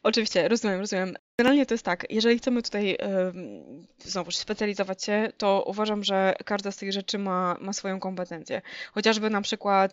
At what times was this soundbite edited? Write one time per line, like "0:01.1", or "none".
none